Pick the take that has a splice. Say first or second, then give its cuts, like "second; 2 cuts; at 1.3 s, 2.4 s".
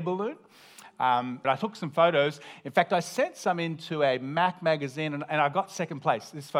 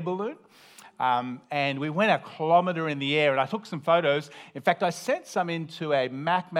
first; 1 cut; at 1.4 s